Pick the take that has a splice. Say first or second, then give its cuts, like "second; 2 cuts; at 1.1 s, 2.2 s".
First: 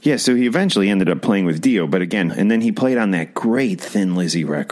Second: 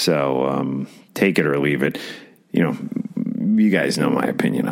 first; 1 cut; at 2.3 s